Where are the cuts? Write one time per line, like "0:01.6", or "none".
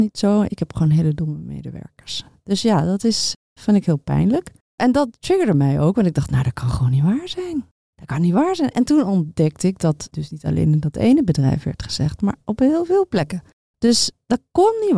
none